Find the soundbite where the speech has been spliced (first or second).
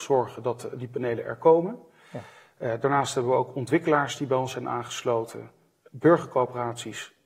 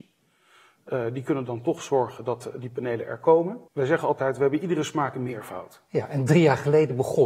second